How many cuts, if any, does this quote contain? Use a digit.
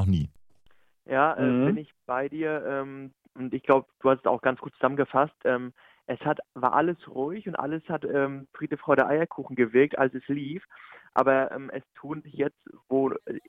0